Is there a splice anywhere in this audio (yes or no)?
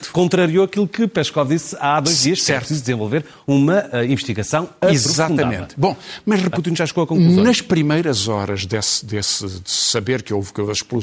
yes